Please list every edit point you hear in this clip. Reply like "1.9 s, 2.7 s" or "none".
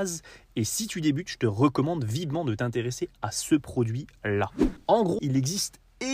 5.2 s